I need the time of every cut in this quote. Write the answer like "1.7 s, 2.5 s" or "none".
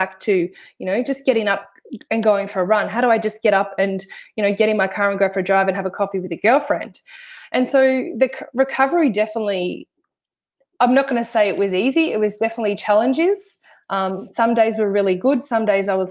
none